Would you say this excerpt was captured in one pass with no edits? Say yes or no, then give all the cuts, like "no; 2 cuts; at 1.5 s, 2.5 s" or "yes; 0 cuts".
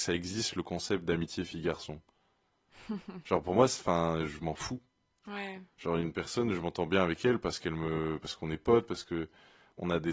yes; 0 cuts